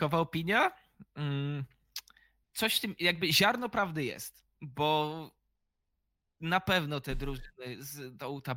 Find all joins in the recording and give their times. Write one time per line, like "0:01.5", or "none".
none